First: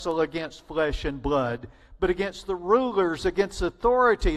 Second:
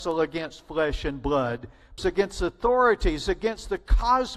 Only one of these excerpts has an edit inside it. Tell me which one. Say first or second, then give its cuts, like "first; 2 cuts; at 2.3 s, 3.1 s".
second; 1 cut; at 2.0 s